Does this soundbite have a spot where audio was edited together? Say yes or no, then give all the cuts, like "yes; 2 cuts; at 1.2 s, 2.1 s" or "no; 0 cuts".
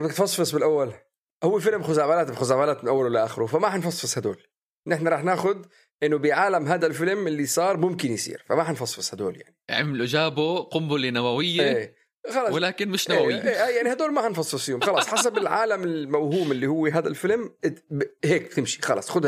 yes; 1 cut; at 1.3 s